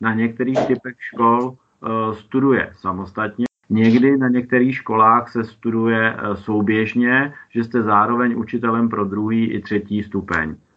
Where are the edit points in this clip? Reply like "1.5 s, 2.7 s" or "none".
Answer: 3.6 s